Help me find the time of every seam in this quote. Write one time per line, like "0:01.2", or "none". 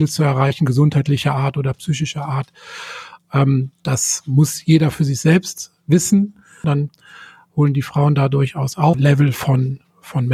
0:06.6
0:08.9